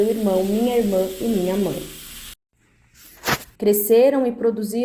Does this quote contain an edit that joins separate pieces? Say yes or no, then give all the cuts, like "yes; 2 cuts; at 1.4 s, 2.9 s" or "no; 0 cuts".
yes; 1 cut; at 3.6 s